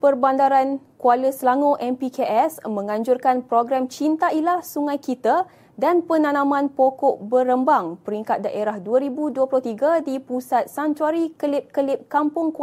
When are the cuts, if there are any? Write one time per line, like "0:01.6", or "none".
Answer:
none